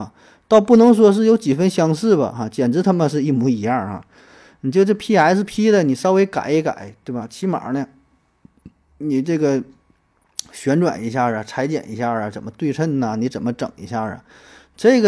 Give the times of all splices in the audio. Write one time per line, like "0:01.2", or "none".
none